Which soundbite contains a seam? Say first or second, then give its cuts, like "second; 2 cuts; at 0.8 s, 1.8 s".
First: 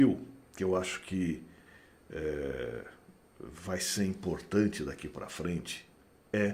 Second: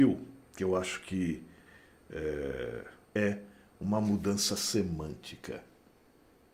second; 1 cut; at 3.0 s